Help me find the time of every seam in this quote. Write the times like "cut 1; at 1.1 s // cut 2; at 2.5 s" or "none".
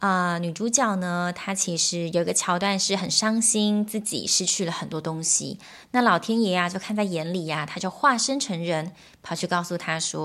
none